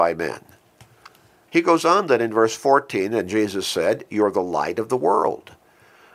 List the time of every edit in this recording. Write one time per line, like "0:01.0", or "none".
0:01.5